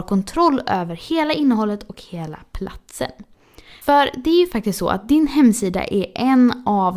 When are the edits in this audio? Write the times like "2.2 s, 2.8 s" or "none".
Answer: 3.8 s